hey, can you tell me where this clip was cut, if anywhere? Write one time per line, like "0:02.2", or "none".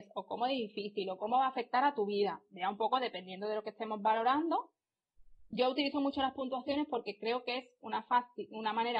none